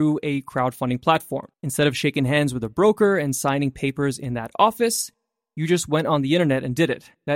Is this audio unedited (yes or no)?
no